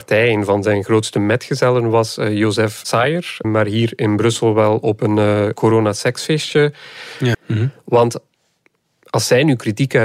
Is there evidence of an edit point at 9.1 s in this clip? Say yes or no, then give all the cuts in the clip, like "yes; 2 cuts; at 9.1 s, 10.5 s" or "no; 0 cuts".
no; 2 cuts; at 3.4 s, 7.3 s